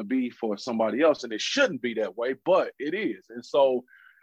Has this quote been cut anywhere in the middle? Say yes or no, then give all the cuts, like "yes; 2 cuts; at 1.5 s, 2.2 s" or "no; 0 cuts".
no; 0 cuts